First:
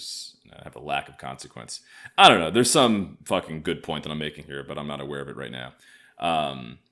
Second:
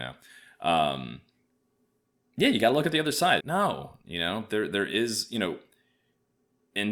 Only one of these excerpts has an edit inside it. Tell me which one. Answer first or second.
second